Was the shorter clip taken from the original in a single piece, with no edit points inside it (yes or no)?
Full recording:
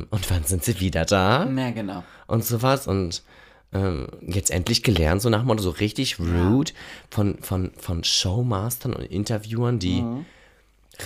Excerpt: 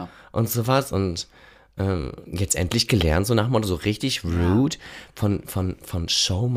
yes